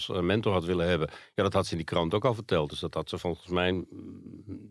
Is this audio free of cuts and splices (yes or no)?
yes